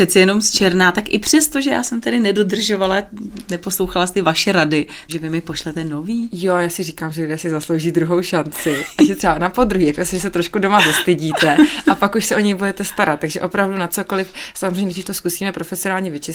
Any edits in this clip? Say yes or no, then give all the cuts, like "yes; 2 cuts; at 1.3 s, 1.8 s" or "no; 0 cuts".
yes; 1 cut; at 5.1 s